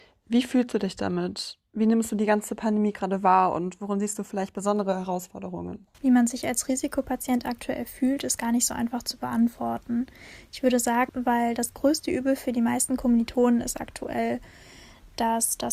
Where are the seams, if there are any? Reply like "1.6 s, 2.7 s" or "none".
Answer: 5.9 s, 11.1 s